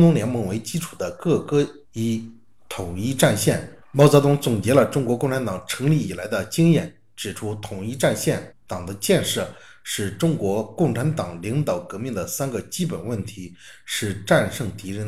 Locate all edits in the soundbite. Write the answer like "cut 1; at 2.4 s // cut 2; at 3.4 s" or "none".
cut 1; at 1.8 s // cut 2; at 3.8 s // cut 3; at 8.5 s